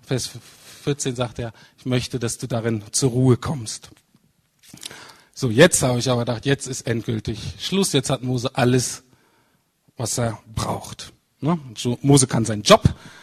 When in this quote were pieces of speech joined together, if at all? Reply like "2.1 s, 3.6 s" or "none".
none

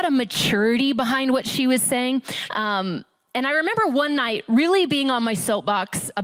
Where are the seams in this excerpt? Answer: 2.5 s

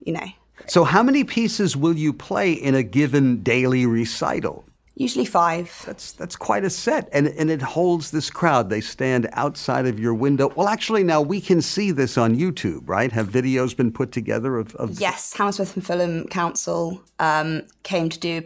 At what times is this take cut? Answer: none

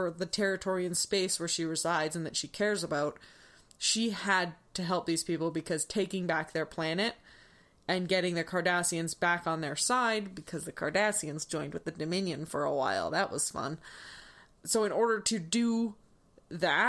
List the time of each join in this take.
none

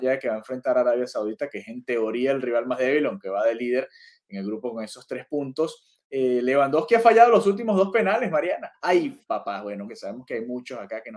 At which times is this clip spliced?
8.7 s, 9.9 s

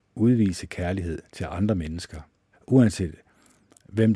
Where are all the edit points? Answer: 2.5 s

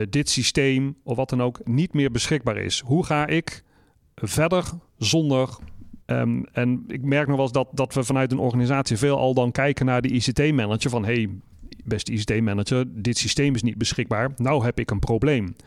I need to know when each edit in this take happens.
4.9 s, 6.0 s

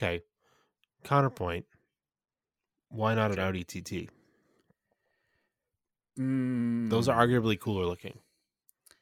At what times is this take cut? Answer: none

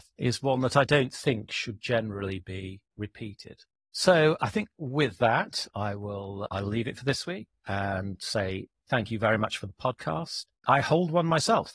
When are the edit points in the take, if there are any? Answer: 8.8 s, 10.6 s

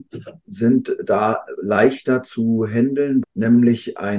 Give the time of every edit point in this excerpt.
3.2 s

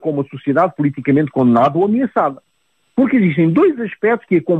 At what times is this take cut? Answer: 2.8 s

